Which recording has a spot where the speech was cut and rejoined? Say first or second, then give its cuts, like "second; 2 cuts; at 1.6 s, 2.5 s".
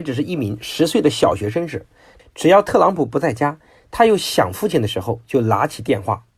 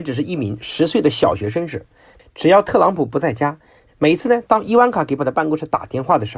second; 2 cuts; at 3.9 s, 5.2 s